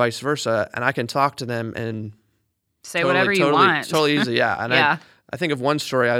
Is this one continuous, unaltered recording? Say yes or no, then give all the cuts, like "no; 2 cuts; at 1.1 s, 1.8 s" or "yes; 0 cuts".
yes; 0 cuts